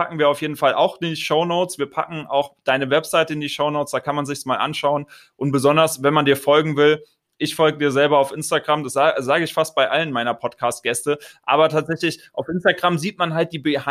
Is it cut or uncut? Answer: uncut